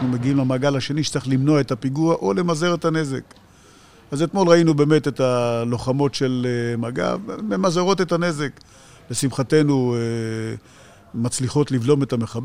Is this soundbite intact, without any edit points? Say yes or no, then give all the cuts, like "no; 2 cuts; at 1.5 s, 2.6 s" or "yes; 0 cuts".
yes; 0 cuts